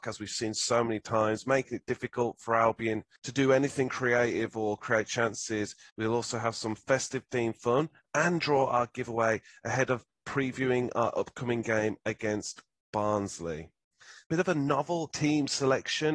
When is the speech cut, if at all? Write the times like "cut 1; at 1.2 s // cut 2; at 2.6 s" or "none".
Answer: cut 1; at 5.9 s // cut 2; at 14.2 s